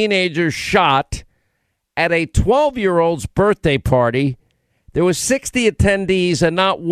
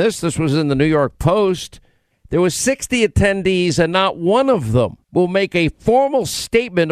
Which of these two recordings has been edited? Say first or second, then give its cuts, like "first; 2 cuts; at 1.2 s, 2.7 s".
second; 2 cuts; at 2.1 s, 5.0 s